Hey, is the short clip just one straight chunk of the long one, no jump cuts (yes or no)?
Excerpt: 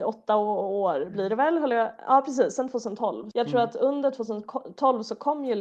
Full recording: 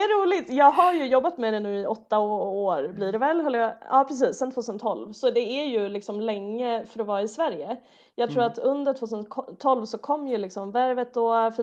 no